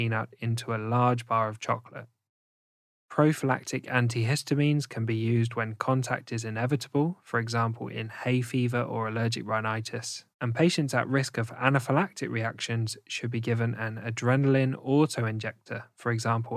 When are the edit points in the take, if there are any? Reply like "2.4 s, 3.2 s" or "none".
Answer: 3.0 s, 10.3 s